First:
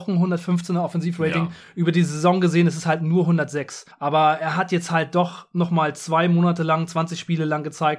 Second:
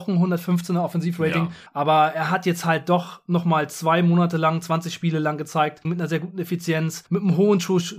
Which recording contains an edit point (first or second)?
second